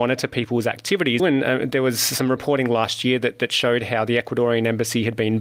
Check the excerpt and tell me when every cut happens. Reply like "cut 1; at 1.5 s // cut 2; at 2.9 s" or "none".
cut 1; at 1.2 s